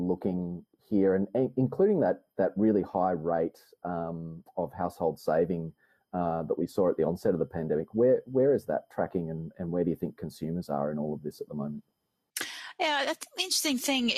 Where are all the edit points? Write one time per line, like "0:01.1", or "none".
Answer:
none